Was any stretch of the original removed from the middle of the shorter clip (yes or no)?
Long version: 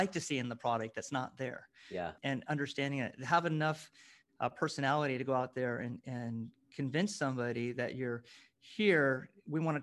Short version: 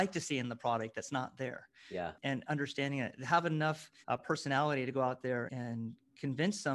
yes